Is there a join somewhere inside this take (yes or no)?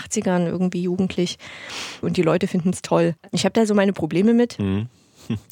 yes